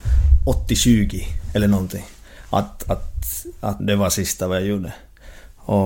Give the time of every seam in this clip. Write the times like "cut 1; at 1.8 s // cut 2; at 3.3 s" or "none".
cut 1; at 3.8 s